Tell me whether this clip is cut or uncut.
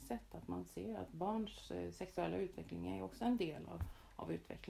uncut